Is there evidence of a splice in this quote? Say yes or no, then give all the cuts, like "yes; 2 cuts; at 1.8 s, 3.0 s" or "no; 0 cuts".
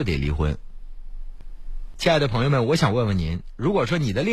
yes; 1 cut; at 1.9 s